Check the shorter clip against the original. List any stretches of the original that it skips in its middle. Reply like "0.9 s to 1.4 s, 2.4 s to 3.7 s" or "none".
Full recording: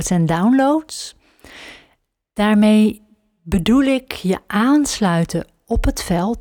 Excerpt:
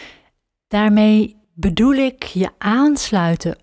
3.1 s to 3.3 s